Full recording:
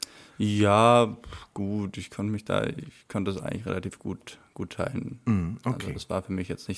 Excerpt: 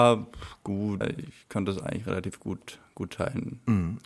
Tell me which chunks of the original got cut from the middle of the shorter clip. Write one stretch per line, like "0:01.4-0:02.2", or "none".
0:01.9-0:02.6